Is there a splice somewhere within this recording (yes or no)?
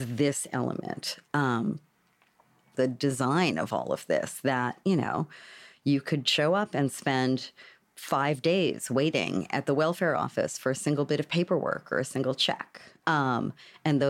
yes